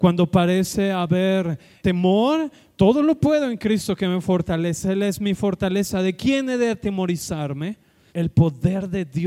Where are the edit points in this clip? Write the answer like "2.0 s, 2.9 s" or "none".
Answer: 1.8 s, 8.1 s